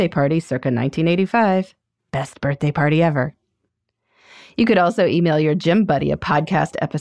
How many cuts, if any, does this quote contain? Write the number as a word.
zero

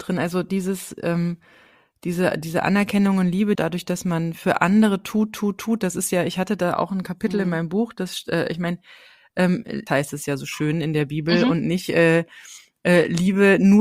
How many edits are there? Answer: two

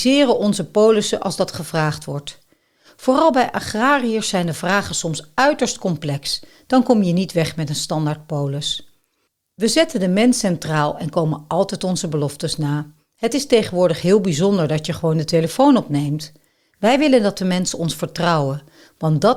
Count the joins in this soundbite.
zero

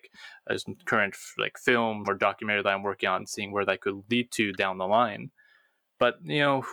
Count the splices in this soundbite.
two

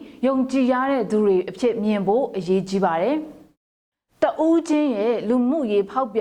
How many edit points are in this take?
zero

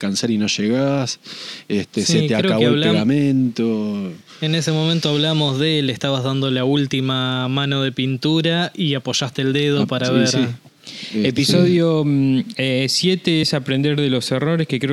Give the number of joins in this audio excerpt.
zero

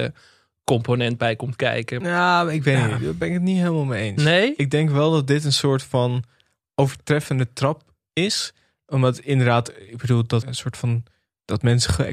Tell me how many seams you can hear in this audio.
one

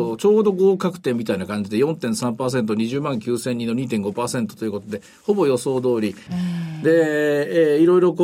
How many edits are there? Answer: one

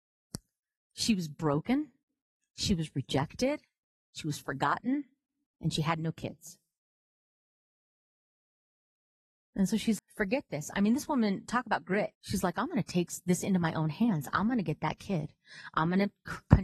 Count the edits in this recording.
two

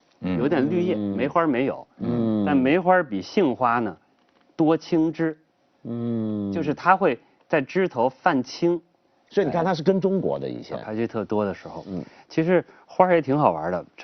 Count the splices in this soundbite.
one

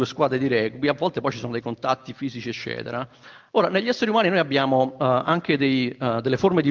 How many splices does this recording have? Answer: one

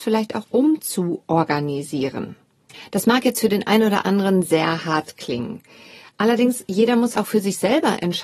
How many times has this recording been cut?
one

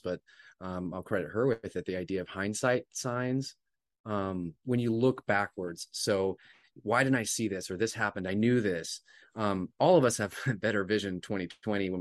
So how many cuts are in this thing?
zero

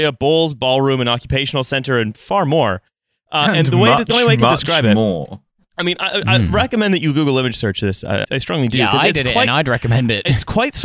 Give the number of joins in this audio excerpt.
one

